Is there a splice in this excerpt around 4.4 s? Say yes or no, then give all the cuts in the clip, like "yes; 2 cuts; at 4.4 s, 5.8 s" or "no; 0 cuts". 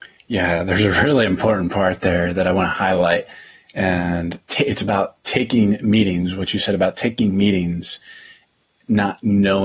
yes; 1 cut; at 4.4 s